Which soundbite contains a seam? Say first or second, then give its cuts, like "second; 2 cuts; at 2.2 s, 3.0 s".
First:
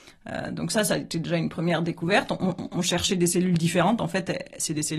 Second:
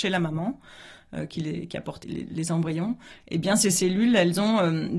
second; 1 cut; at 2.0 s